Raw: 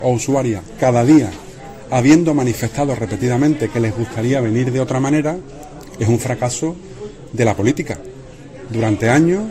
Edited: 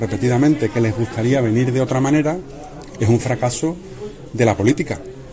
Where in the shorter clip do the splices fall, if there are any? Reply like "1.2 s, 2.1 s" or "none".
none